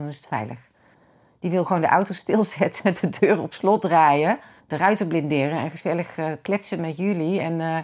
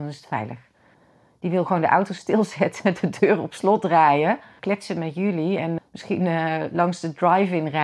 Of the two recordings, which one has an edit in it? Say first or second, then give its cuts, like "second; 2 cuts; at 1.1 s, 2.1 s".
second; 2 cuts; at 4.6 s, 5.8 s